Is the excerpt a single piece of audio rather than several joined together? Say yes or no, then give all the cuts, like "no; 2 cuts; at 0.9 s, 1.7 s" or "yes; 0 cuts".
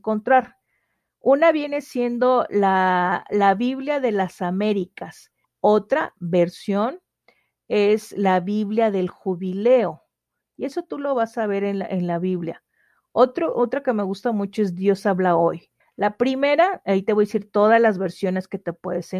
no; 2 cuts; at 5.4 s, 15.8 s